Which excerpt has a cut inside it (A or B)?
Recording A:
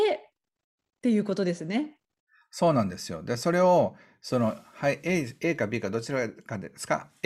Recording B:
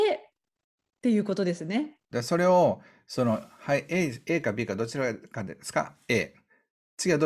B